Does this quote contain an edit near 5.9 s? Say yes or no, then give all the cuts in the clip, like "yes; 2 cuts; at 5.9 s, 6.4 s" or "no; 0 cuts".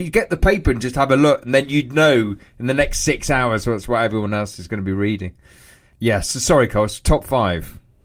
no; 0 cuts